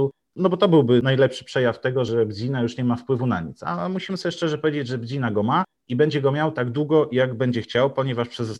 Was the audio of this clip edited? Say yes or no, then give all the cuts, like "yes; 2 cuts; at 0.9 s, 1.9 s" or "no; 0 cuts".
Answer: no; 0 cuts